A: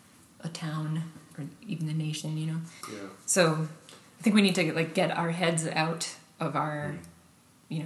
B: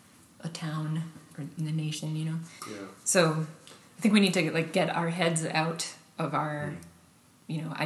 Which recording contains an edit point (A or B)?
B